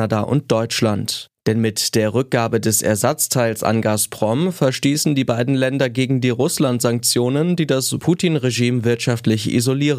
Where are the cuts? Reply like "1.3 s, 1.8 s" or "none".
none